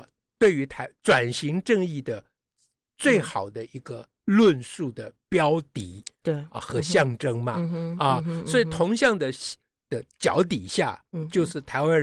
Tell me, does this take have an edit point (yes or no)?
no